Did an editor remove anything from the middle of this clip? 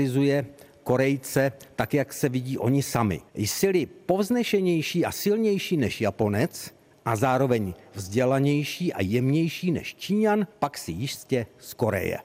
yes; 2 cuts; at 3.3 s, 10.5 s

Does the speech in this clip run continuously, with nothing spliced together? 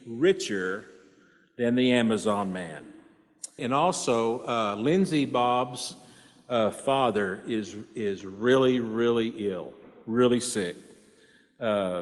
no; 1 cut; at 3.6 s

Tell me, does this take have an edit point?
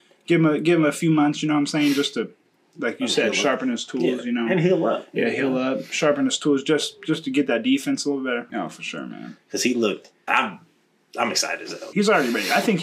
yes; 3 cuts; at 8.5 s, 10.3 s, 11.9 s

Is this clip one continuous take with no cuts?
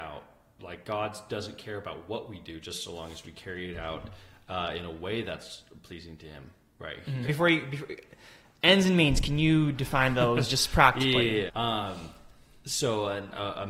no; 2 cuts; at 7.2 s, 11.5 s

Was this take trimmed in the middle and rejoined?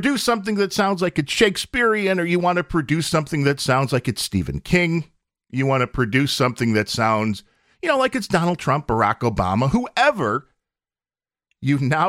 no; 0 cuts

